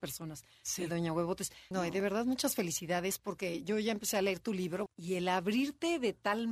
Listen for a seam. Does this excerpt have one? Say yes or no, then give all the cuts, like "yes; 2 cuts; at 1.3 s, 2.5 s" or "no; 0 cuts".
yes; 2 cuts; at 1.7 s, 4.9 s